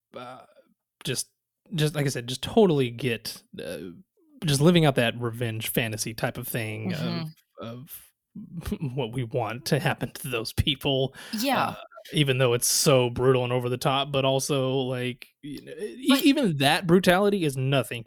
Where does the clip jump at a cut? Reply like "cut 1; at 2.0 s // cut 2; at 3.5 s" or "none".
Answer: none